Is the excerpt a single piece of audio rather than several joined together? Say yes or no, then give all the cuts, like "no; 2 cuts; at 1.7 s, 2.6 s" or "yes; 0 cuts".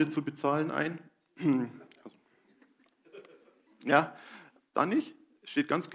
no; 1 cut; at 4.7 s